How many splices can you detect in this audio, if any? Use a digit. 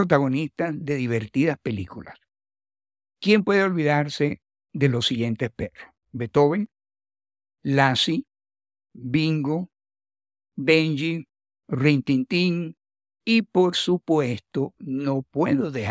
0